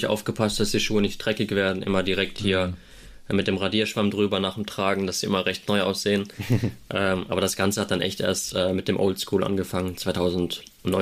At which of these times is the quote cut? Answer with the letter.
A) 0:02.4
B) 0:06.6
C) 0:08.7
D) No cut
D